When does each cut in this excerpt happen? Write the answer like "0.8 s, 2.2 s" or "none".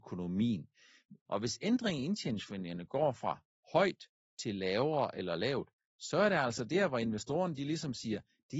1.3 s

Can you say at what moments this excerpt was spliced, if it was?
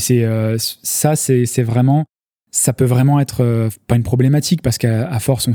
none

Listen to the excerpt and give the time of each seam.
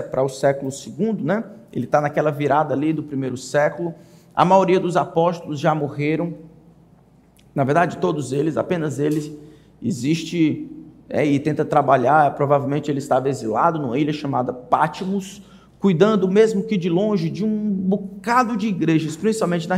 none

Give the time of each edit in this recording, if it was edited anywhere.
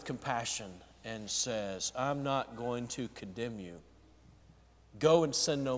none

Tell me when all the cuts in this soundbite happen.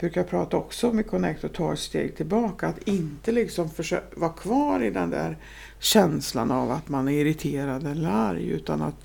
none

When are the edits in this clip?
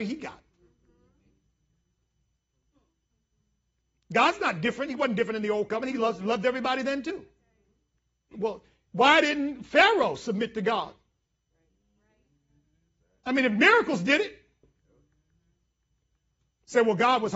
8.3 s

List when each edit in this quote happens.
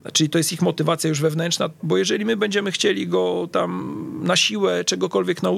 1.8 s

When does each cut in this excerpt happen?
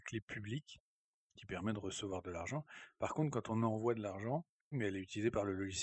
4.7 s

